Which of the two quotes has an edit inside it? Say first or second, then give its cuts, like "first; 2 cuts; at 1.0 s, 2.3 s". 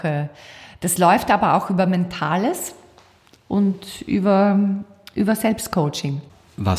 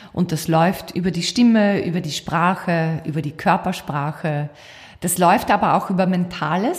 second; 1 cut; at 0.9 s